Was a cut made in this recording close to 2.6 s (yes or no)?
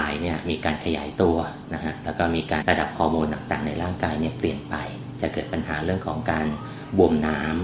yes